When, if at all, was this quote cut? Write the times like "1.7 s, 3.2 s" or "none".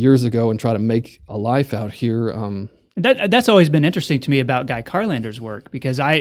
none